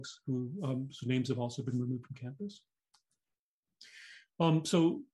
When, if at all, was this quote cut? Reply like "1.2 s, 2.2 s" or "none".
none